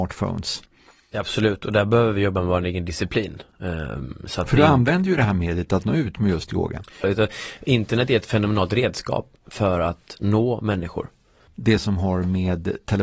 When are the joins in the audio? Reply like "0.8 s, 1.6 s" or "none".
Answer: 7.0 s, 11.5 s